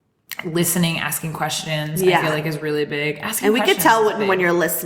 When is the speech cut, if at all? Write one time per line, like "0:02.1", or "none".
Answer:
none